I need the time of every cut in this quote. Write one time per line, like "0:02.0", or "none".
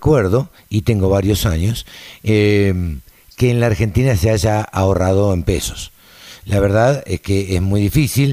none